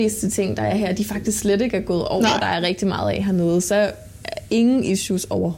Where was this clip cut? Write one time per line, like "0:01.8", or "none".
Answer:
0:02.4